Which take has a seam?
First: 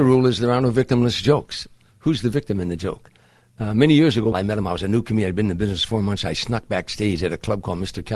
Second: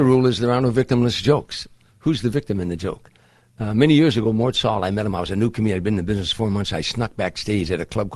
first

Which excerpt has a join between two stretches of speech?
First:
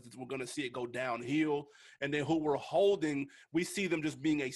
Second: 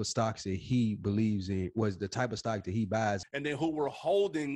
second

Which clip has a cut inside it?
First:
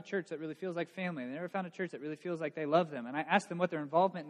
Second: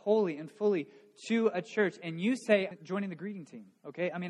second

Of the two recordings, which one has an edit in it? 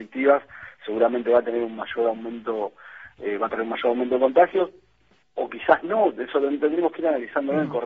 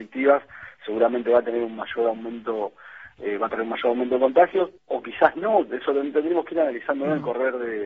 second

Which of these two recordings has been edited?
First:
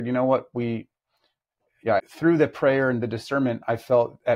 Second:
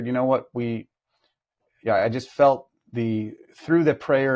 first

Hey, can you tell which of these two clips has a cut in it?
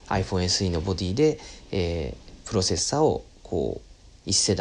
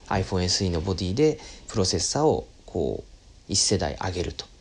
second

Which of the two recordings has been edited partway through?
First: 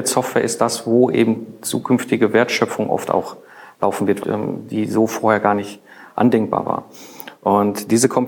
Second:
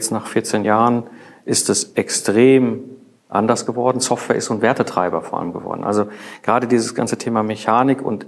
first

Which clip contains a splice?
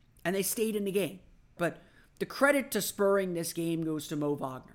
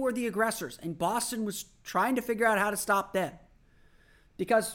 first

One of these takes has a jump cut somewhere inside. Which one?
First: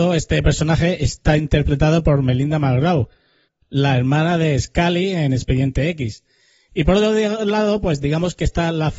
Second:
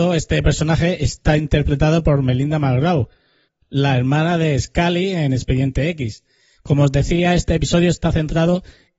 second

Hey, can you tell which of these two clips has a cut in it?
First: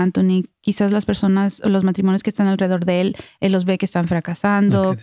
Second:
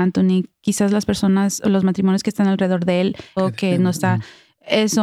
second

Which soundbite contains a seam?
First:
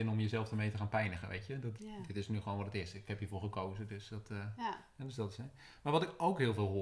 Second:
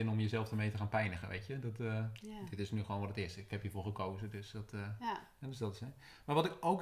first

